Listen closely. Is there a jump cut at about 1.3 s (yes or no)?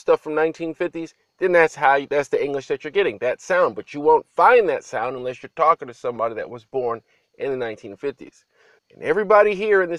no